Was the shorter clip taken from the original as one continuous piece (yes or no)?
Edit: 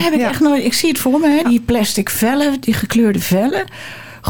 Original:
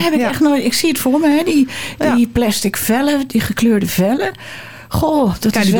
no